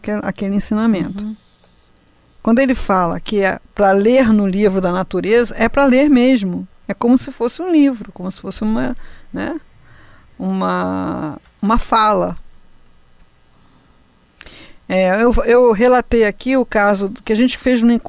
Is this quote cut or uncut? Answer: uncut